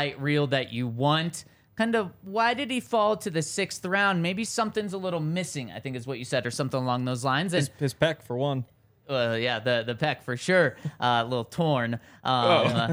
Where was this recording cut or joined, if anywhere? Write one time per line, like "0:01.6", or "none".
none